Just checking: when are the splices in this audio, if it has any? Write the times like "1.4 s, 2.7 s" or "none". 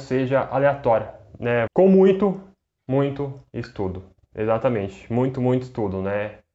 1.7 s